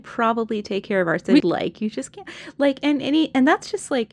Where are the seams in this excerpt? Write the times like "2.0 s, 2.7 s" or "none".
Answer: 1.4 s